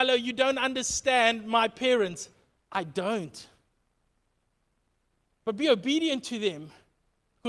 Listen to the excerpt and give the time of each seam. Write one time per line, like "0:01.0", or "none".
none